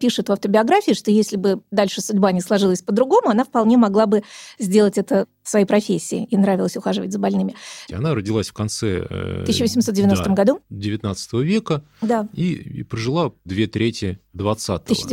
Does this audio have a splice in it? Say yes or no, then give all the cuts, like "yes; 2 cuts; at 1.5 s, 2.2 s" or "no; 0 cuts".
yes; 2 cuts; at 7.9 s, 13.5 s